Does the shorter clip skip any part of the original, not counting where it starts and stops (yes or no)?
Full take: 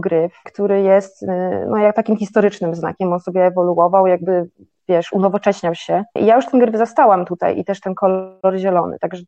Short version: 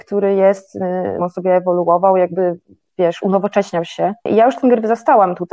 yes